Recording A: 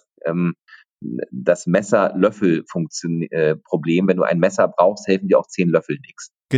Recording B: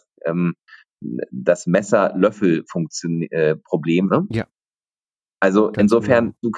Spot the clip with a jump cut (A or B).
B